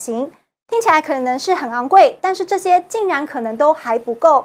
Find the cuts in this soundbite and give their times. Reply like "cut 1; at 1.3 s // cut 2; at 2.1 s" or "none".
none